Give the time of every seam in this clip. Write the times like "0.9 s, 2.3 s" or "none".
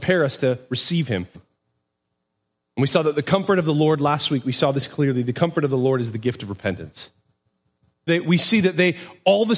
1.3 s, 8.1 s